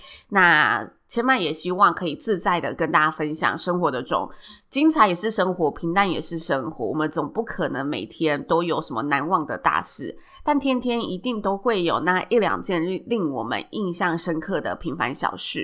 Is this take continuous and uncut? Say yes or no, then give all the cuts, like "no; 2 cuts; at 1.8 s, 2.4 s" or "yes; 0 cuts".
no; 1 cut; at 4.0 s